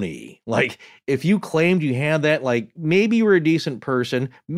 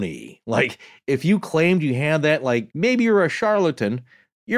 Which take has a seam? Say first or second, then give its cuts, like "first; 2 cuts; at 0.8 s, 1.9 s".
second; 1 cut; at 2.7 s